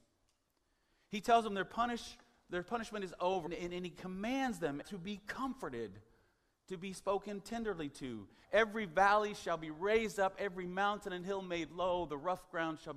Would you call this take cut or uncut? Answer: cut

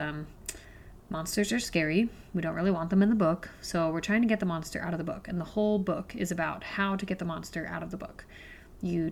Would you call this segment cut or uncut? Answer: uncut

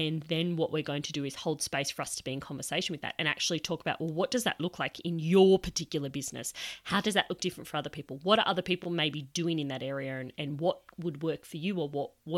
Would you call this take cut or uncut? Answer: uncut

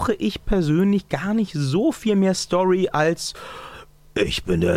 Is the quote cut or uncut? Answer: uncut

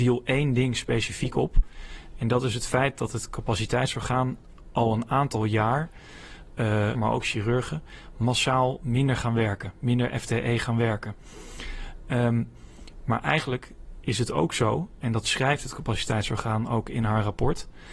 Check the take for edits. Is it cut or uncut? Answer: cut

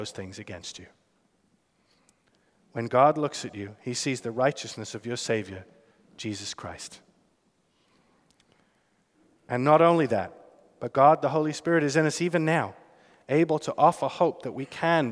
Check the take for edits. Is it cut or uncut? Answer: uncut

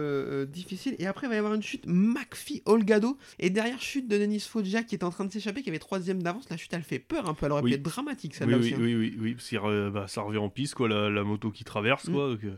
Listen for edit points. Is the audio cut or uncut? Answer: cut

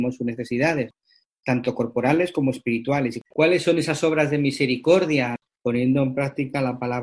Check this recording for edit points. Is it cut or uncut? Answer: cut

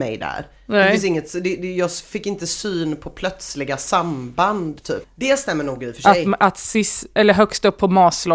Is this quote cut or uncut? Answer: cut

